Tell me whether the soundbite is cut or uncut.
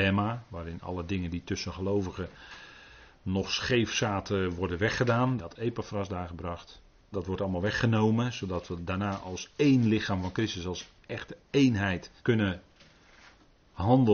cut